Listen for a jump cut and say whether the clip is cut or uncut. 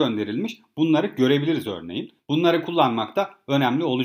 uncut